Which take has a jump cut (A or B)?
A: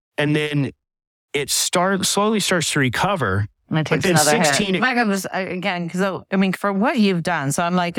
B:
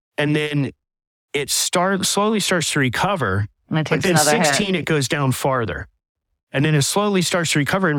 A